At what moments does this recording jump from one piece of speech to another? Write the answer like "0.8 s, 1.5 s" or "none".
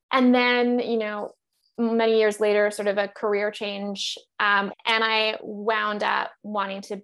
4.7 s